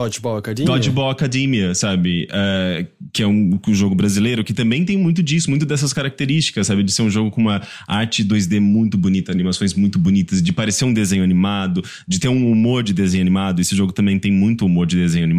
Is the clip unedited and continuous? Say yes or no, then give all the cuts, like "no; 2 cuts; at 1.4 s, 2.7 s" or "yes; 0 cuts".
yes; 0 cuts